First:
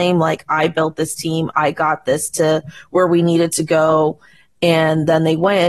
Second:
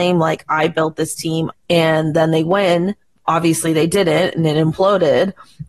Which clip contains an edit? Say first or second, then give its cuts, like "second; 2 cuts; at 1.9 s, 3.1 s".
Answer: second; 1 cut; at 1.5 s